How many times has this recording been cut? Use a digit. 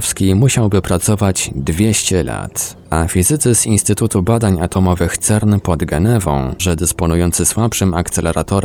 1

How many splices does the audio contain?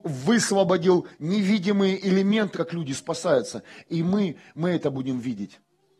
1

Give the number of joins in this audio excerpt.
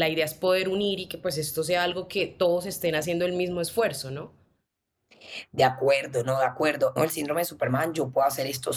1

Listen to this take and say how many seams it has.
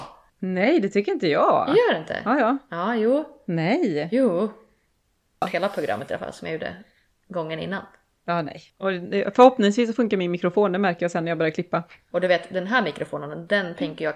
1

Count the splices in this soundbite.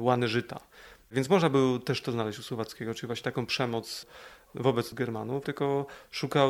1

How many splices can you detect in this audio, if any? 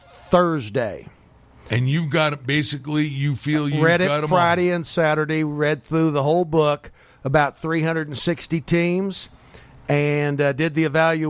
0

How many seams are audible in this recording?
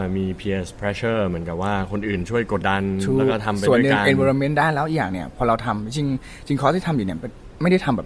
1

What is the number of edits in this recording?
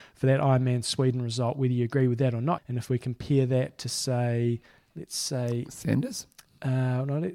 1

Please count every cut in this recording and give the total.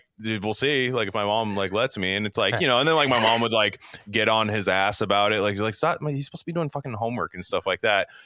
0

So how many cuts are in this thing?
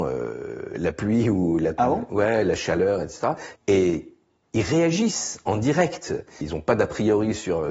2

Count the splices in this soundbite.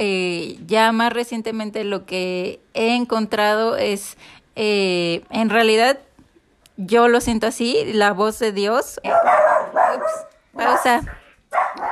1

